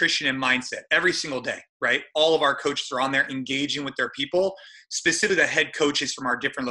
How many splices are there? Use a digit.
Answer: 0